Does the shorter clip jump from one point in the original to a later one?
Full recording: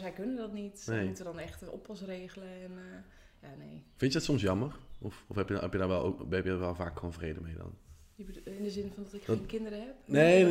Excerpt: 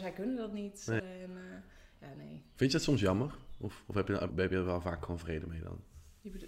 yes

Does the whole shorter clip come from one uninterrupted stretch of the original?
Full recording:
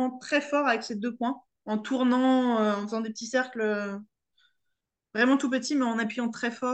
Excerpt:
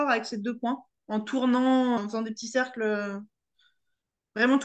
no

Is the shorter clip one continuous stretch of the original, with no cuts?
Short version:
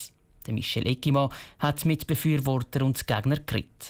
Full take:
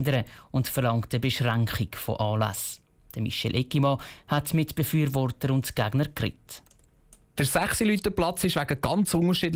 yes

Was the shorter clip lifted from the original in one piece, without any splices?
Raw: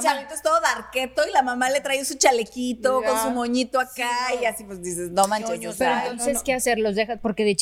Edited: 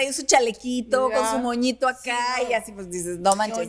yes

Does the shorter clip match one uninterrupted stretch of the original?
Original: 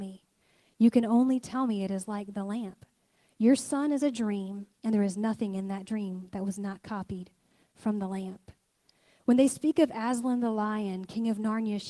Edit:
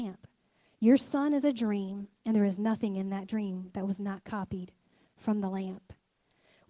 yes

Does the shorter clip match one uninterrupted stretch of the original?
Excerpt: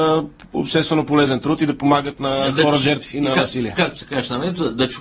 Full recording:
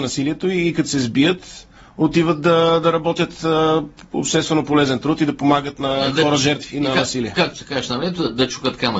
yes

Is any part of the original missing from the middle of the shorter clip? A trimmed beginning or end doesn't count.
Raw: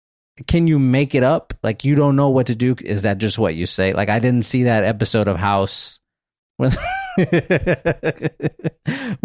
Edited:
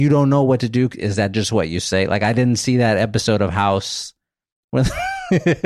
no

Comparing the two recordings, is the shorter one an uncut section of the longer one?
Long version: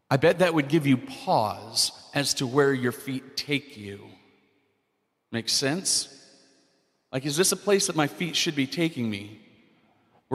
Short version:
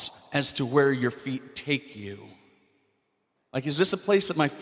no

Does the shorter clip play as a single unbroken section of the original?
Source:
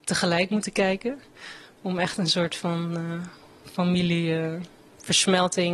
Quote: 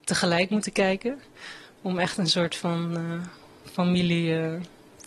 yes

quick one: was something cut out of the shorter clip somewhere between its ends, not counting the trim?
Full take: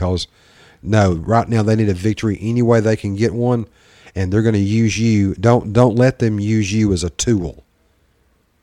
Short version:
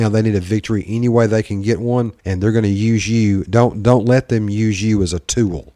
yes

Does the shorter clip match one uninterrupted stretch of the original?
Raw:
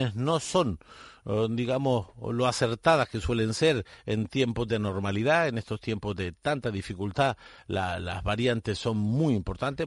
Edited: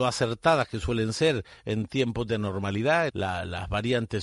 no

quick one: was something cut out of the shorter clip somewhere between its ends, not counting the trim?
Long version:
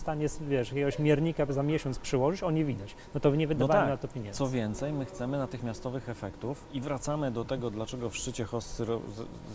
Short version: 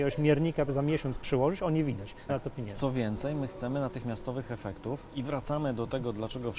yes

